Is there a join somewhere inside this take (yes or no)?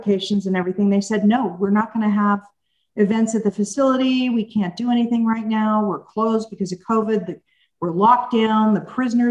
no